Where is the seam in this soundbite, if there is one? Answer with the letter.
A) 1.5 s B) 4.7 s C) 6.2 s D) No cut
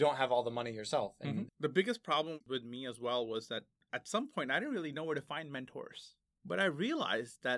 A